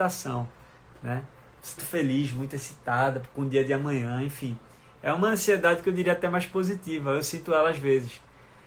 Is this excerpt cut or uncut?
cut